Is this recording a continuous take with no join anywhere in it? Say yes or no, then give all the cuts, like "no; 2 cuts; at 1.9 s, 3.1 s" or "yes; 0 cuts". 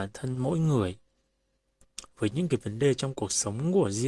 no; 1 cut; at 2.1 s